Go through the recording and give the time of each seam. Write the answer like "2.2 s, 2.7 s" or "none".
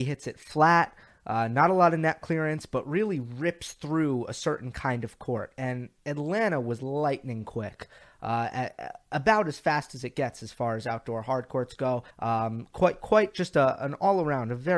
12.1 s